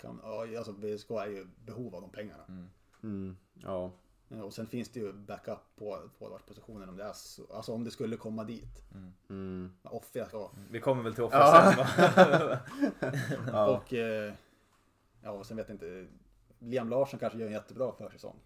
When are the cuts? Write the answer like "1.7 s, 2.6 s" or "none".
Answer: 10.3 s